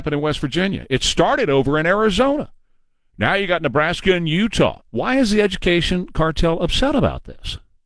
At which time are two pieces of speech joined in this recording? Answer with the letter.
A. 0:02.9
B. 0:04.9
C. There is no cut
B